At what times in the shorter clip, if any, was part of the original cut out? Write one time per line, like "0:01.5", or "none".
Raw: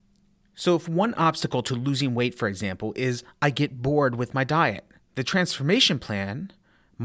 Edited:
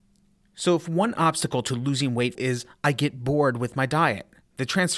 0:02.4